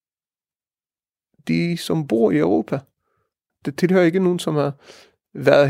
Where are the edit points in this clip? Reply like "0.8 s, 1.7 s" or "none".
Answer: 3.5 s